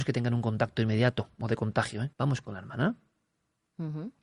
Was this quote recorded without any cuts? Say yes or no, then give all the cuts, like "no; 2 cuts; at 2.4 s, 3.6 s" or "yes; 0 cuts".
no; 1 cut; at 2.1 s